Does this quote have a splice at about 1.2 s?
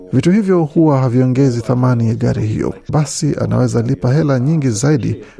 no; 1 cut; at 2.9 s

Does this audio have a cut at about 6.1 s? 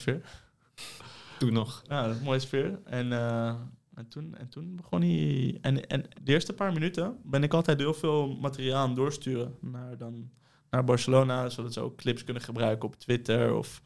yes; 1 cut; at 6.1 s

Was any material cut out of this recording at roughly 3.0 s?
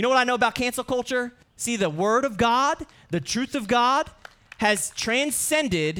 no; 1 cut; at 1.4 s

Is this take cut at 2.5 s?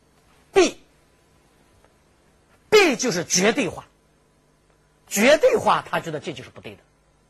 yes; 1 cut; at 2.5 s

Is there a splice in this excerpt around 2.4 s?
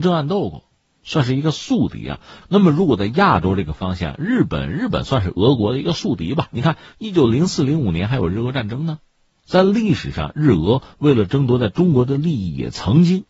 yes; 1 cut; at 2.4 s

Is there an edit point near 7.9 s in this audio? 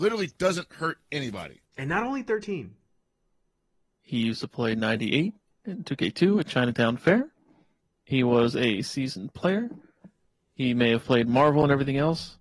no; 1 cut; at 1.7 s

